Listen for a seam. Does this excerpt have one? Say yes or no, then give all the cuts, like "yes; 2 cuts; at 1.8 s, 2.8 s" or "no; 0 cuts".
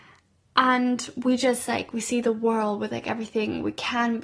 no; 0 cuts